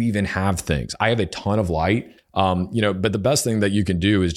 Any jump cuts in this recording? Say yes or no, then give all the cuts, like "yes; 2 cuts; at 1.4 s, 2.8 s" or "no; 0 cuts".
yes; 1 cut; at 2.2 s